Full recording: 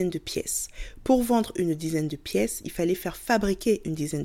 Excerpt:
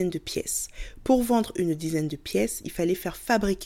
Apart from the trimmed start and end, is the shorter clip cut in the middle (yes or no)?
no